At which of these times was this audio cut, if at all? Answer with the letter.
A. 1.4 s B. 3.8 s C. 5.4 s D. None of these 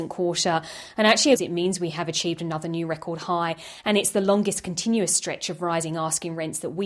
A